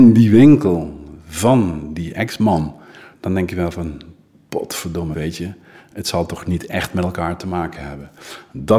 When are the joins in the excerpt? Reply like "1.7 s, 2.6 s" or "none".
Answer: 3.1 s, 5.1 s